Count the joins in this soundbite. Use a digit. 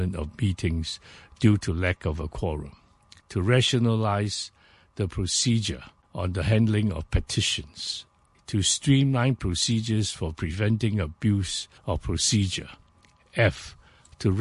3